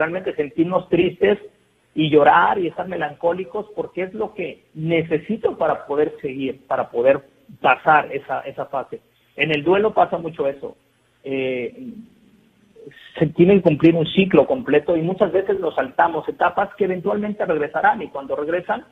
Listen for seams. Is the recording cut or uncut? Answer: uncut